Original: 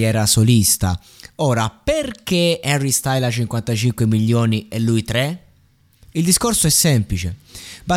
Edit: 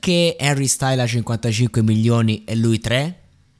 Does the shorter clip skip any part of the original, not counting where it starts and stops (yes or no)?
no